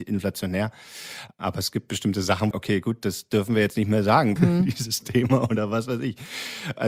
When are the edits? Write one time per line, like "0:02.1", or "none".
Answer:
0:02.5
0:04.4